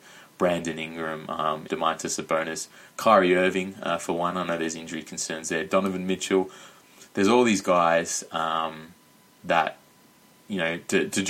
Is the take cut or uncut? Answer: cut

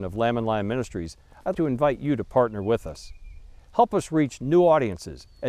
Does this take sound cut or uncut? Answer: cut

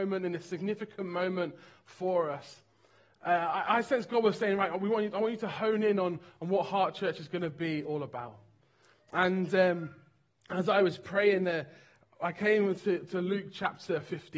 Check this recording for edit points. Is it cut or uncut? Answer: uncut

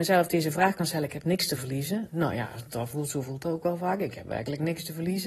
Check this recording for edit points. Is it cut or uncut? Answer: uncut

